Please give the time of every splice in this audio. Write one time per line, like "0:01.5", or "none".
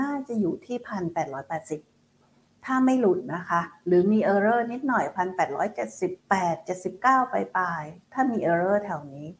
0:06.2